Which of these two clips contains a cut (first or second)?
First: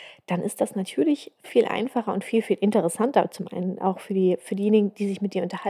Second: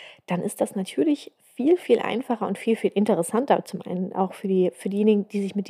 first